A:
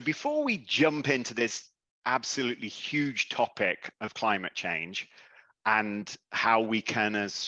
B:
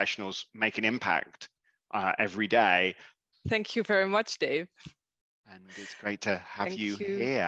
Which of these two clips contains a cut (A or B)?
B